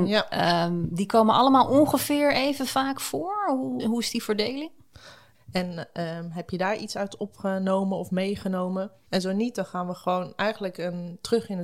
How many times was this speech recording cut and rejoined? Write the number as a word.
three